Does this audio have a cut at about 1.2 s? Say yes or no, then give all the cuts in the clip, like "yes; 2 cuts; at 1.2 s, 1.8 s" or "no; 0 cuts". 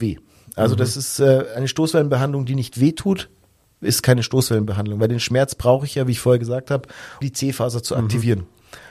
no; 1 cut; at 7.2 s